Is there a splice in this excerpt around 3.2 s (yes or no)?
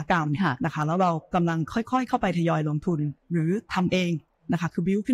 yes